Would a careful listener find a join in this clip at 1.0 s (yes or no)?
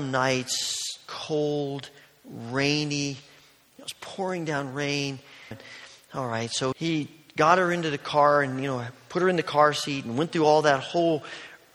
no